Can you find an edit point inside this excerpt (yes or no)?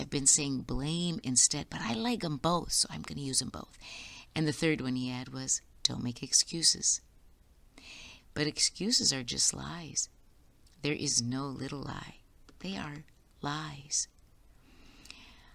yes